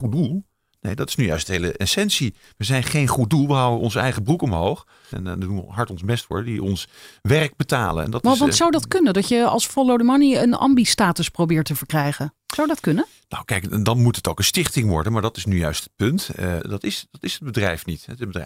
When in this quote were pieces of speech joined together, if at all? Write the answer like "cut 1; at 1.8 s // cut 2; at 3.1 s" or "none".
cut 1; at 5.1 s // cut 2; at 16.6 s